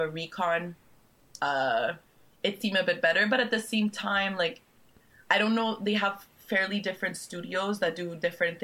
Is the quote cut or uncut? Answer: cut